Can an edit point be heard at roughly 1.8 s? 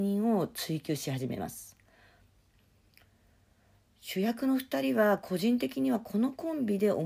no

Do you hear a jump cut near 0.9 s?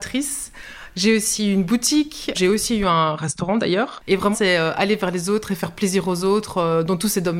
no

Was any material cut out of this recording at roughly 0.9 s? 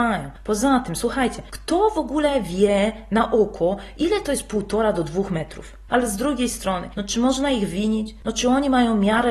no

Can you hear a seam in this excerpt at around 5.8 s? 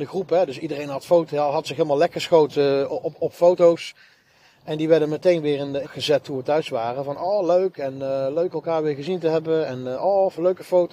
yes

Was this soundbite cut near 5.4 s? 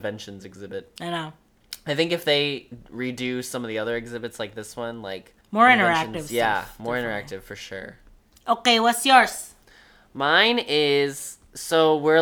yes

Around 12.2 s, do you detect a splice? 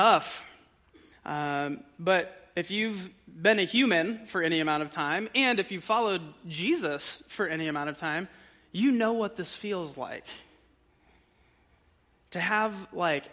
no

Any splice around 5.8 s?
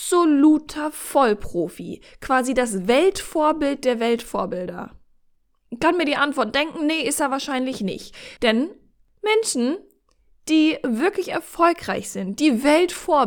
no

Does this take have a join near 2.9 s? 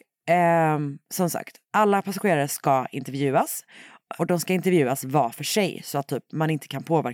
no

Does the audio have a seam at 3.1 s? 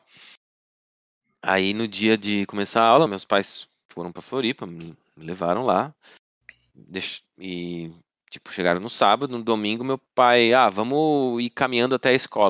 yes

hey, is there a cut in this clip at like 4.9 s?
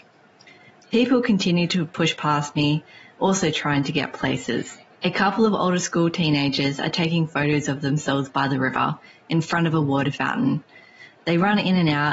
yes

